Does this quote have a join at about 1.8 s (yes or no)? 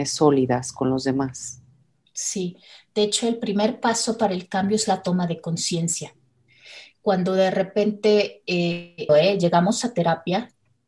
no